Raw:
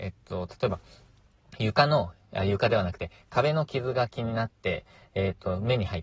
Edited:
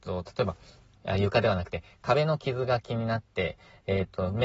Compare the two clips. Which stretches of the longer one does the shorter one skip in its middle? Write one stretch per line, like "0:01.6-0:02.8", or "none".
0:01.2-0:02.2